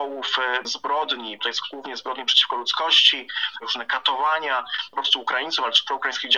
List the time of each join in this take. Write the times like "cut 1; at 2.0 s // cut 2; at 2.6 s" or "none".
cut 1; at 1.4 s // cut 2; at 3.6 s